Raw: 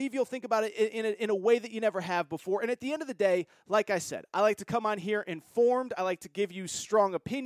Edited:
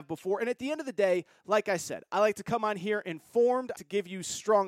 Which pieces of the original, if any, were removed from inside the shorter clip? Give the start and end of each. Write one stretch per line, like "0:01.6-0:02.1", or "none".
0:06.0-0:06.2

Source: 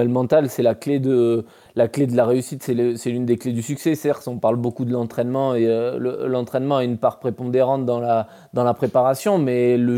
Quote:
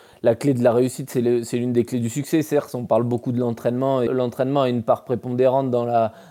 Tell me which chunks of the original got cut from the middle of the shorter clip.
0:05.6-0:06.2

